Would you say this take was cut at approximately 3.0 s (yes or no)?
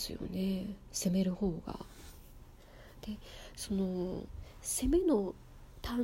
no